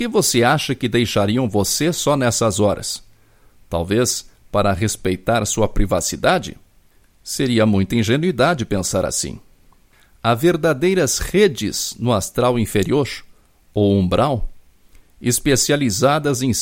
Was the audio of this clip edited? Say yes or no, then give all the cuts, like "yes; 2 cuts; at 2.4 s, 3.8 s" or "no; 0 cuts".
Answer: no; 0 cuts